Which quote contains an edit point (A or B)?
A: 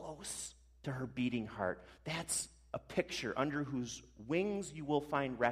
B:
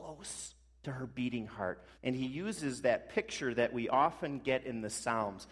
B